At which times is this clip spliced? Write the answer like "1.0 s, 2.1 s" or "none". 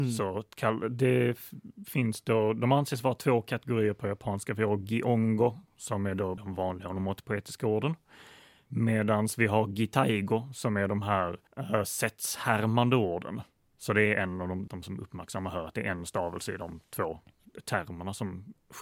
6.4 s, 11.5 s, 14.7 s